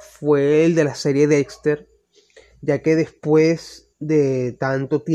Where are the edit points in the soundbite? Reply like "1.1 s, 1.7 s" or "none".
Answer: none

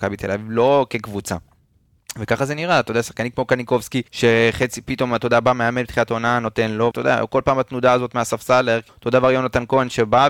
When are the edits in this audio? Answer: 4.1 s, 6.9 s, 8.9 s

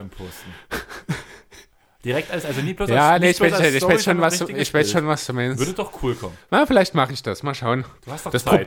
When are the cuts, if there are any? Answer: none

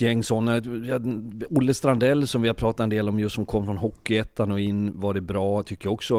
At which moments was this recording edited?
none

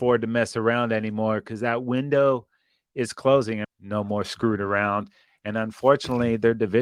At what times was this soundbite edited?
3.6 s

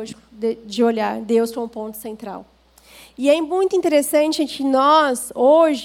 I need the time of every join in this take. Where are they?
none

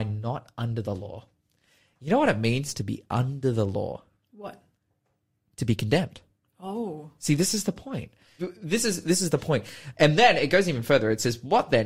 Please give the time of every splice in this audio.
8.4 s, 10.0 s

